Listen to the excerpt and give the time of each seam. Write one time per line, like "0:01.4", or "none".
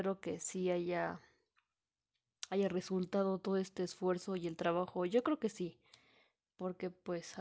none